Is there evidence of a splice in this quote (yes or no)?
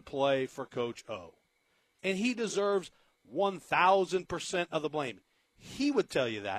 no